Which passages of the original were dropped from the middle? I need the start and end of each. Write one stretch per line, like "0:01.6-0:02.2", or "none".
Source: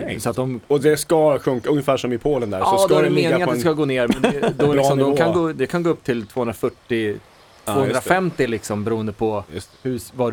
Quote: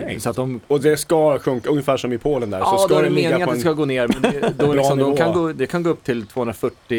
none

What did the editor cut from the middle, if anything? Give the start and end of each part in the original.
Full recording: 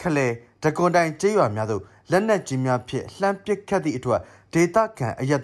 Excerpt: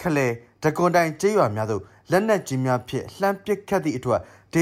none

